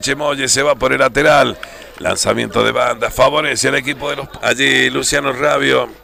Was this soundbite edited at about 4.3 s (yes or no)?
yes